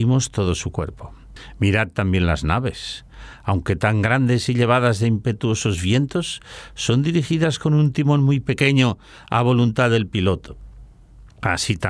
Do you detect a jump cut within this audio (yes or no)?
no